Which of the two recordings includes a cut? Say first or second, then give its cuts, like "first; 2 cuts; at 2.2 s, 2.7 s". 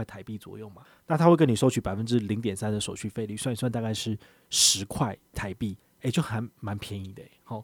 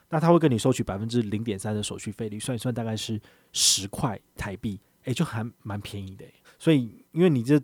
second; 1 cut; at 6.4 s